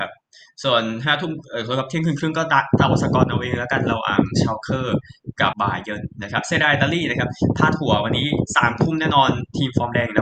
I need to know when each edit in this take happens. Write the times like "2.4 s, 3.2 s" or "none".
5.5 s

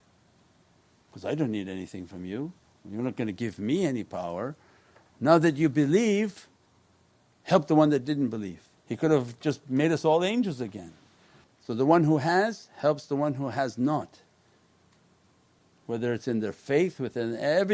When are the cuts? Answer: 8.8 s, 11.4 s

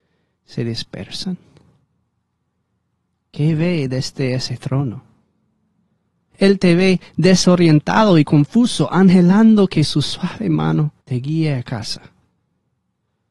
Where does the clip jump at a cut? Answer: 6.3 s, 11.0 s

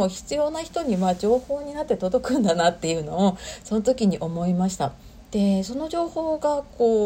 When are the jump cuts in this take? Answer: 5.3 s

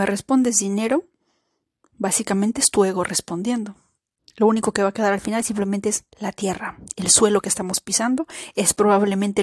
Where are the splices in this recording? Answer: 4.2 s, 6.1 s

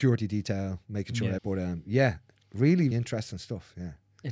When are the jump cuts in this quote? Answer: 1.4 s, 2.9 s

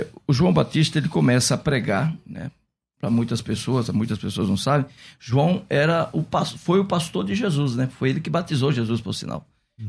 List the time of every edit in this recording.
none

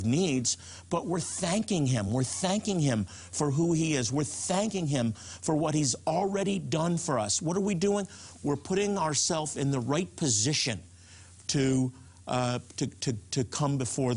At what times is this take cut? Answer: none

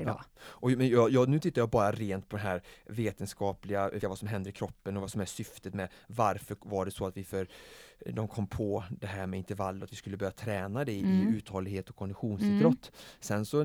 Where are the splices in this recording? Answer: 4.0 s

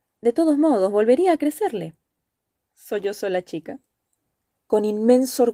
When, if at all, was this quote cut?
2.7 s

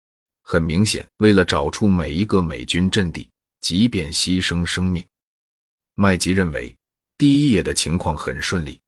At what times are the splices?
1.1 s, 3.6 s

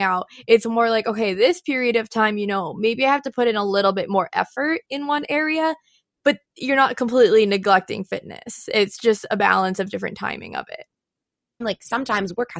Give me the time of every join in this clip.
11.6 s

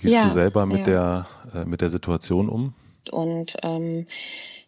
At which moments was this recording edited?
3.0 s

